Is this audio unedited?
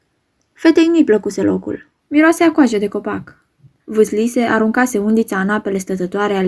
no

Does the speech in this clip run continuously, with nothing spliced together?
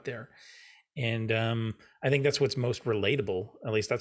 yes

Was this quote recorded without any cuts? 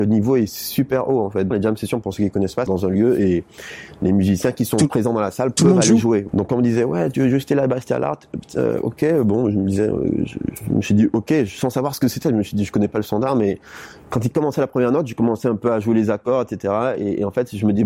no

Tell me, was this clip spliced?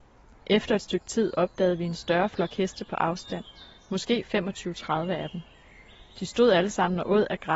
no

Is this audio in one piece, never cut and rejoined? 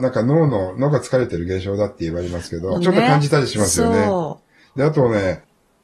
no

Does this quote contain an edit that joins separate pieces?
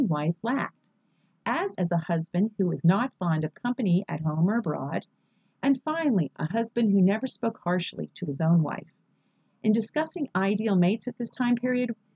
yes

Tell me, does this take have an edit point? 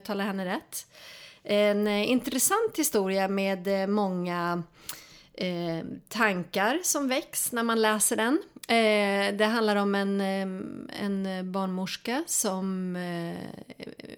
no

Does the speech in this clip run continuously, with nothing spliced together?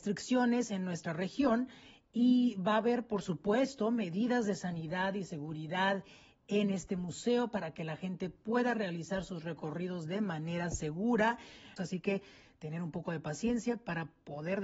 no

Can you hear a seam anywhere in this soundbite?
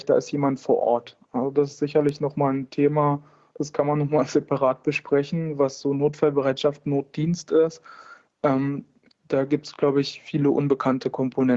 no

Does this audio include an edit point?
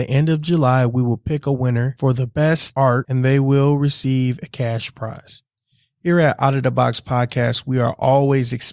no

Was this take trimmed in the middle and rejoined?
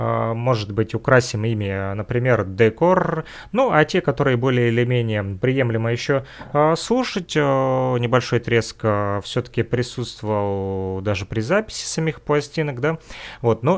no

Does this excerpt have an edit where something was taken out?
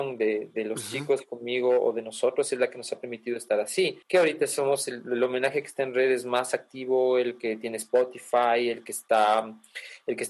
yes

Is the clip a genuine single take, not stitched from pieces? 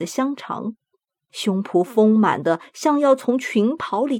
no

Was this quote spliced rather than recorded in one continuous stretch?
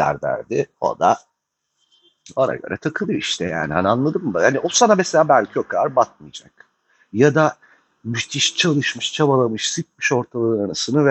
no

